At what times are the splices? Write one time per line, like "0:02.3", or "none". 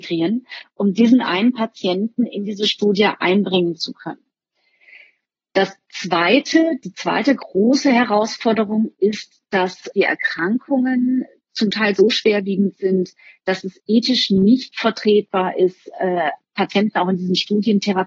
0:09.9